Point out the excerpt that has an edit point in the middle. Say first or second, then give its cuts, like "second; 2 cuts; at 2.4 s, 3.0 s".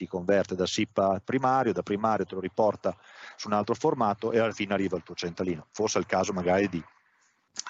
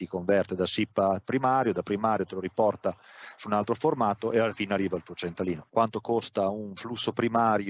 second; 1 cut; at 5.7 s